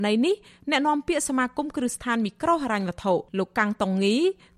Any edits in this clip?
yes; 1 cut; at 3.3 s

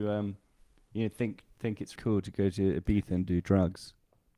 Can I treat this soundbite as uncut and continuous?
no; 1 cut; at 2.0 s

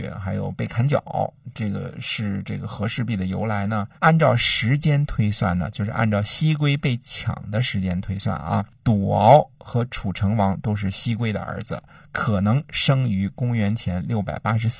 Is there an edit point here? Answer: yes; 1 cut; at 4.0 s

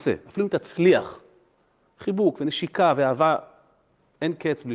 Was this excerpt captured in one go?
yes; 0 cuts

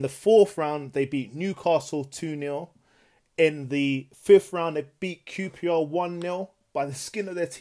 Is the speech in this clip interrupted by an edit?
no; 0 cuts

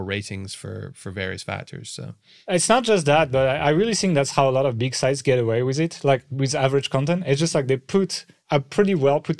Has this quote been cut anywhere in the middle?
no; 0 cuts

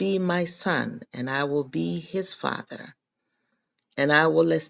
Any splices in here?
no; 0 cuts

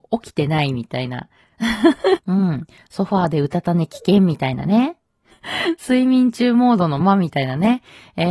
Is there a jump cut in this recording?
yes; 3 cuts; at 2.2 s, 5.3 s, 7.0 s

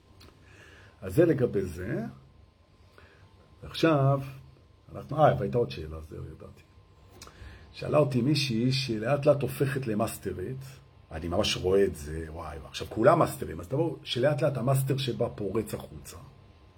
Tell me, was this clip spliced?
no; 0 cuts

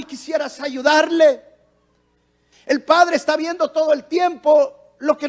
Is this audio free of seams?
no; 1 cut; at 2.5 s

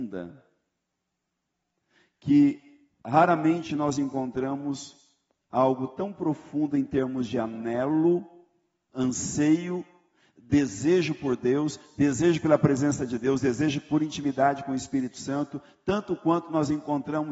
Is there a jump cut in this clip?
no; 0 cuts

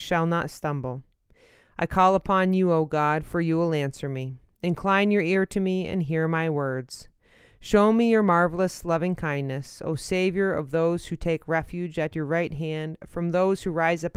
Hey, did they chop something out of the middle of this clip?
no; 0 cuts

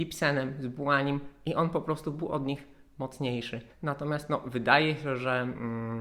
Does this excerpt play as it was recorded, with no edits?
no; 1 cut; at 3.7 s

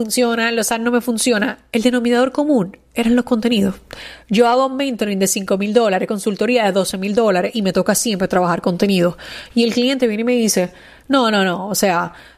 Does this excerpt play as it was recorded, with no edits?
yes; 0 cuts

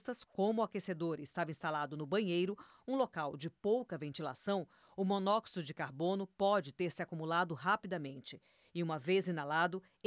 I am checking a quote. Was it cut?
no; 0 cuts

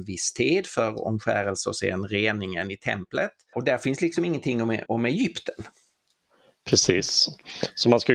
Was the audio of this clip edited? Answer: yes; 2 cuts; at 3.5 s, 4.9 s

